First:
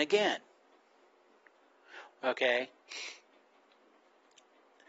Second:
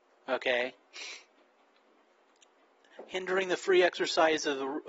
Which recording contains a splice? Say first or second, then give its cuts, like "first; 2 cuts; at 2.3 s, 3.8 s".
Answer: first; 1 cut; at 2.1 s